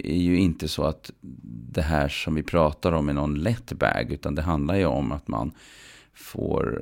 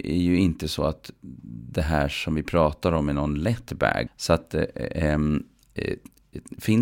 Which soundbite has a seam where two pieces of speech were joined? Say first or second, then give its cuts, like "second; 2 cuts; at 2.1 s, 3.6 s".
second; 1 cut; at 4.1 s